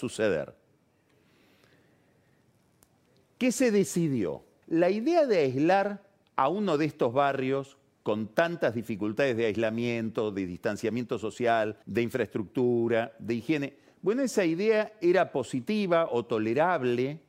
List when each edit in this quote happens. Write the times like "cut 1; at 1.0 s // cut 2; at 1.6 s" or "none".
cut 1; at 4.6 s // cut 2; at 11.8 s